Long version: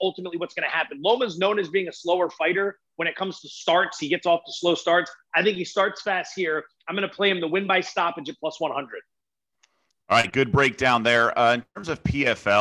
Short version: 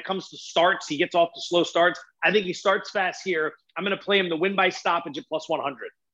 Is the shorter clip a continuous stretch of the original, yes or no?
yes